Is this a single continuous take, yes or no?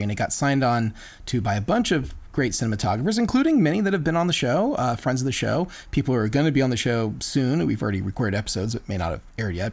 yes